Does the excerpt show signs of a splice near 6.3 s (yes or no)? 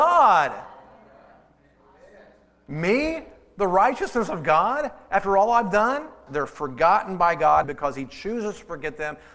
yes